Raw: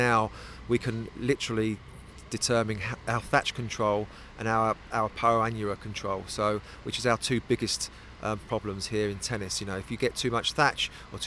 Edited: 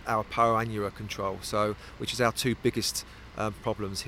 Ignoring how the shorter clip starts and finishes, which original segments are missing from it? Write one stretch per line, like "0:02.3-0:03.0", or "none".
none